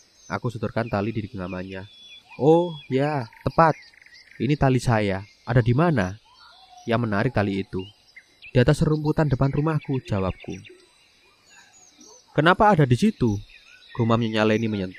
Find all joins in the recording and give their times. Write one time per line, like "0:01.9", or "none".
none